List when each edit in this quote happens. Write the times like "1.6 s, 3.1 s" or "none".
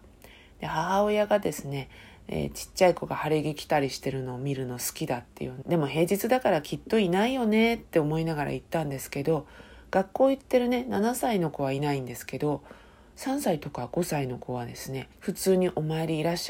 5.6 s, 15.1 s